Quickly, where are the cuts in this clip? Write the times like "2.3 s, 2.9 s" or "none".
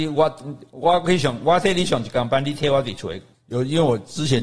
3.3 s